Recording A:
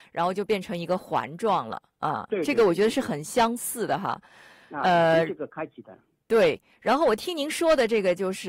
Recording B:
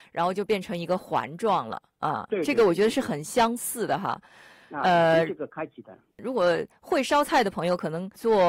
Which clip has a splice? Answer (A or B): B